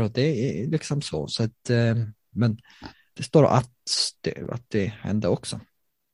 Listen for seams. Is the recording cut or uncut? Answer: cut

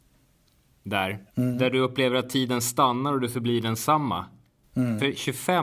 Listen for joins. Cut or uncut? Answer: cut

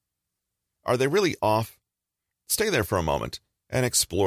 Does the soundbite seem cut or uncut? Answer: cut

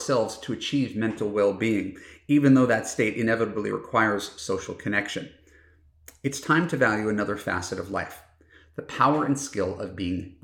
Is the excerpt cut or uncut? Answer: uncut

